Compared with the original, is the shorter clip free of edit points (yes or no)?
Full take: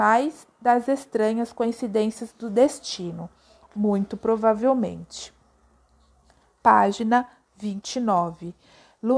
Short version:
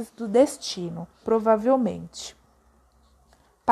no